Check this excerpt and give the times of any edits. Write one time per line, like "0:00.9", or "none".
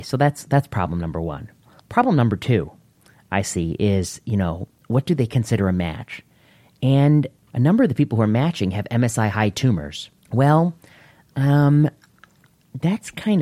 0:10.2